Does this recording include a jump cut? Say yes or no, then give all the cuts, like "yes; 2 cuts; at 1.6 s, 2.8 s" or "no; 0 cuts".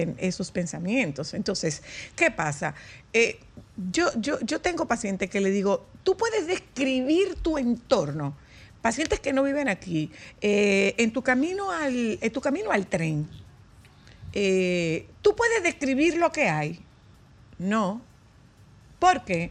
no; 0 cuts